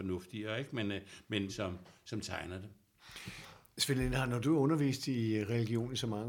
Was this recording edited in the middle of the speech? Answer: yes; 1 cut; at 1.5 s

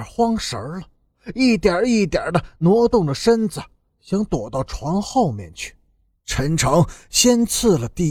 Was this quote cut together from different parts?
yes; 1 cut; at 6.2 s

